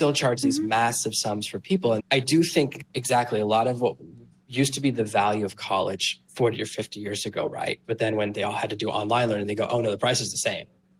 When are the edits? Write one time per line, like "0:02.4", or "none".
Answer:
0:02.0
0:07.8